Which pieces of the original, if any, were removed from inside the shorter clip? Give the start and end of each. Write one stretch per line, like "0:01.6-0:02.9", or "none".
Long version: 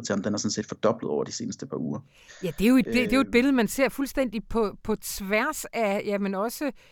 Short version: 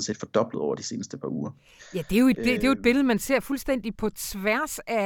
0:04.4-0:04.8